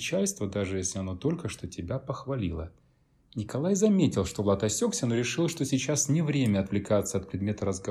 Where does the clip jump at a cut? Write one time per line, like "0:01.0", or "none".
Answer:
none